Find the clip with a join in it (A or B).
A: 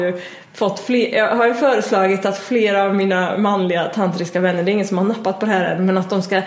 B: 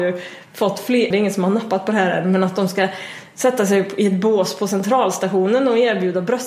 B